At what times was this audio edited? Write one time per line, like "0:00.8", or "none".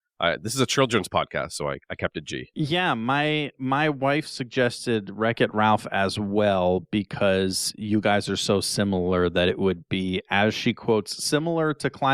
none